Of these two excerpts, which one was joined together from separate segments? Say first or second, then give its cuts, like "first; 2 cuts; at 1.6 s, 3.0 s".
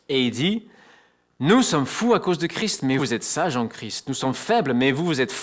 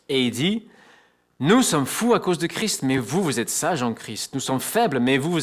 first; 1 cut; at 3.0 s